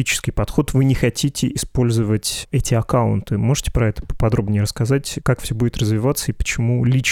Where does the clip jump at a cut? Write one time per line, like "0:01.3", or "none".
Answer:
none